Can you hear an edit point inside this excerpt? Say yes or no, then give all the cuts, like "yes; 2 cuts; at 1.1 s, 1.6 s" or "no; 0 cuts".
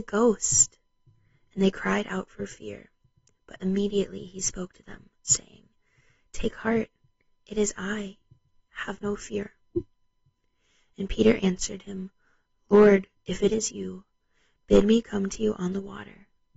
no; 0 cuts